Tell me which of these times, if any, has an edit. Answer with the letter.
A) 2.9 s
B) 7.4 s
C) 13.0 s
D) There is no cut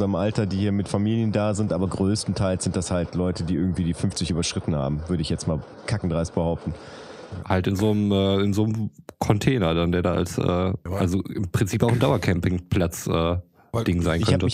B